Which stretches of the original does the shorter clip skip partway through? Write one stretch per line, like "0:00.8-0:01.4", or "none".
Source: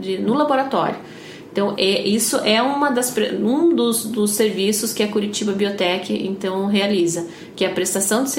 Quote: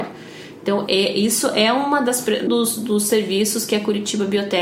0:03.4-0:03.7